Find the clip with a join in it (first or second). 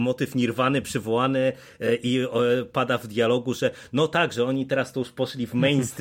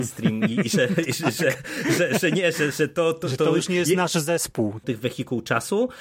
second